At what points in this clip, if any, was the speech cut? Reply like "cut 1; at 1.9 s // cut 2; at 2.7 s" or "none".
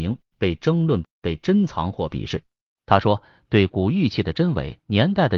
cut 1; at 2.8 s